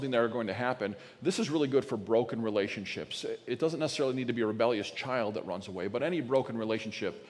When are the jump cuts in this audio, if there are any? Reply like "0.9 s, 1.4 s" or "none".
none